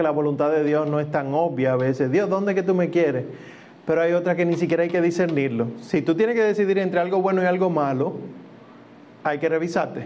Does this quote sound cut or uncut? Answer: uncut